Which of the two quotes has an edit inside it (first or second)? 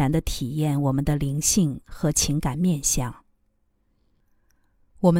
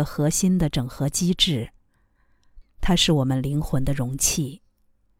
second